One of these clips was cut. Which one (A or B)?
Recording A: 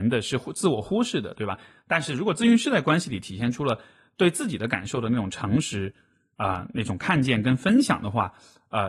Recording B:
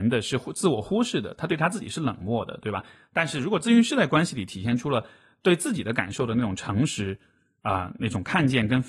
A